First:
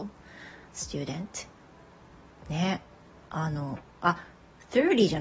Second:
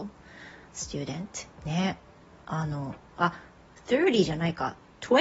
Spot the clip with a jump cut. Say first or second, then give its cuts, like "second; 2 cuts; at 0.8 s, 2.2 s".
second; 1 cut; at 1.5 s